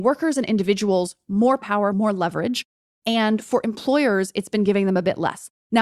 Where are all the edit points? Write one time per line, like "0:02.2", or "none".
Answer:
0:01.9